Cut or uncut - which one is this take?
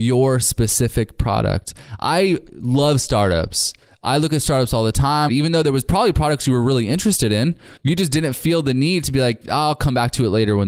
cut